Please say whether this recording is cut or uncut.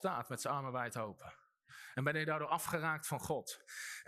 cut